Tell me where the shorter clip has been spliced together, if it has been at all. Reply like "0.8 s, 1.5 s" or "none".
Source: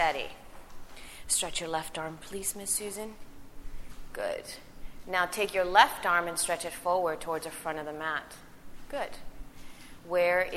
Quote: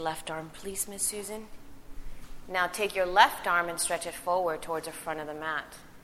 2.4 s